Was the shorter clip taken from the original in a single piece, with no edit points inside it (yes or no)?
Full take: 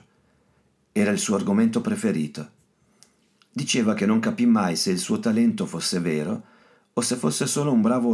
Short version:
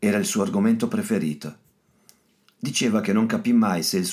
yes